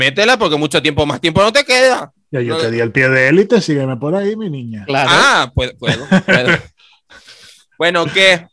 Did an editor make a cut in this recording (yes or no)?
no